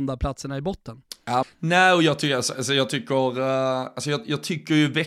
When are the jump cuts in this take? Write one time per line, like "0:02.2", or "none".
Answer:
0:01.4